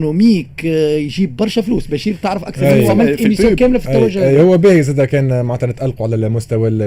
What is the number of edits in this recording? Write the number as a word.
zero